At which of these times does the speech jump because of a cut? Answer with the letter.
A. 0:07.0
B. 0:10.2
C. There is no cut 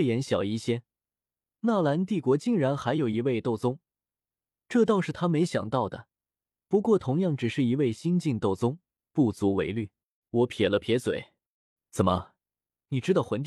B